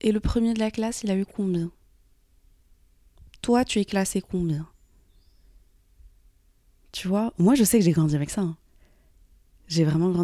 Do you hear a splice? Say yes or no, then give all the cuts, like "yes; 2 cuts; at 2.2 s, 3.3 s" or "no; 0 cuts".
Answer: no; 0 cuts